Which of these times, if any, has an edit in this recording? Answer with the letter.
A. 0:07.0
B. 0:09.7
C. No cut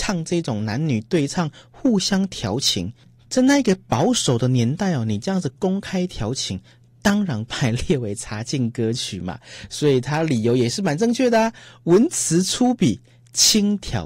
C